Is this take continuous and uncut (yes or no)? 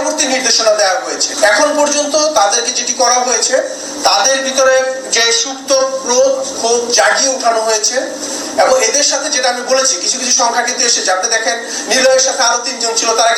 yes